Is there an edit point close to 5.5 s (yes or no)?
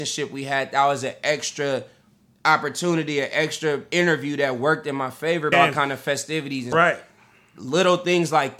yes